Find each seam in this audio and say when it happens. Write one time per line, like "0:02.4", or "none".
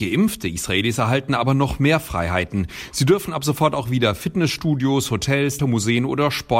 0:05.6